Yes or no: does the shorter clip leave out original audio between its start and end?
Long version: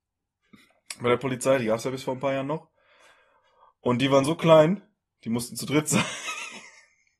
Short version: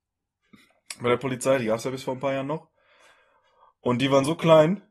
no